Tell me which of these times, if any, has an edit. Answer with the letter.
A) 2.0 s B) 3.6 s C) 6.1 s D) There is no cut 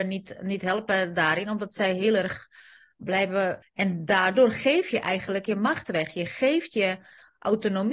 B